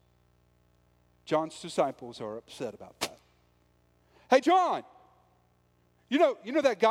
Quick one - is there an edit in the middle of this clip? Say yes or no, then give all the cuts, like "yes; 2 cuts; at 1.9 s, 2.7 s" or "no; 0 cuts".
no; 0 cuts